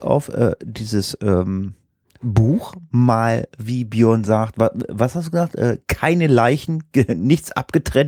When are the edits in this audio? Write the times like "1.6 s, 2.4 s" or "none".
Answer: none